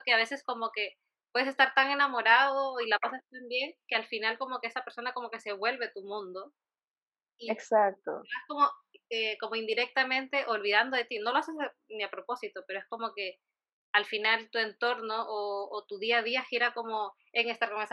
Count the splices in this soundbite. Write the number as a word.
zero